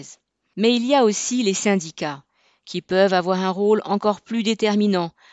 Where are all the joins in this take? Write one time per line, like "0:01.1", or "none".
none

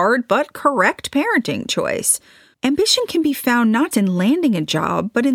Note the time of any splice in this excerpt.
0:02.5
0:03.9

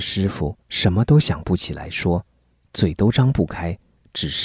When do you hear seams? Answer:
none

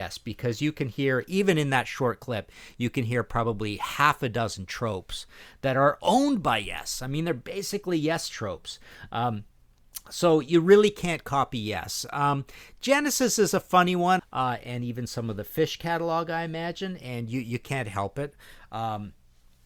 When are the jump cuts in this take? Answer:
0:14.2

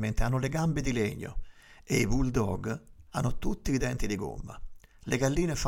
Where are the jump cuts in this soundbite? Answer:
0:03.1

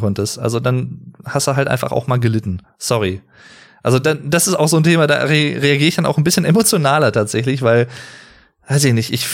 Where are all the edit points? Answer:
none

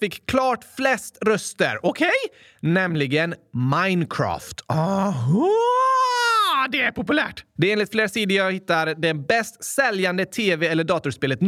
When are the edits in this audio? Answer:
0:07.6

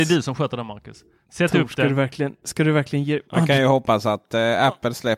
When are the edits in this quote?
0:03.2

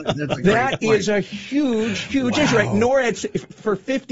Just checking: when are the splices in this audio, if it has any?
none

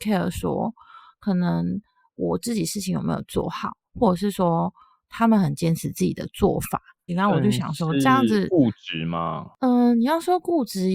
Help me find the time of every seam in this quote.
0:07.1

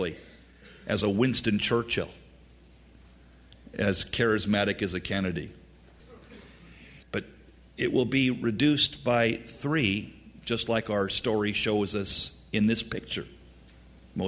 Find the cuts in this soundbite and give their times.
0:07.0

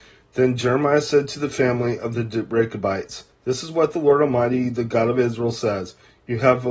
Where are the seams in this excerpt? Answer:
none

